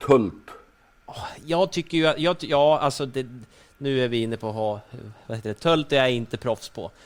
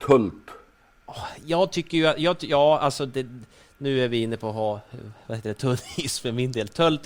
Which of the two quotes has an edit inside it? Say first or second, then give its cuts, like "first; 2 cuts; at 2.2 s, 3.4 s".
first; 1 cut; at 5.6 s